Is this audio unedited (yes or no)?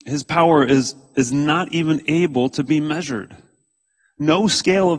yes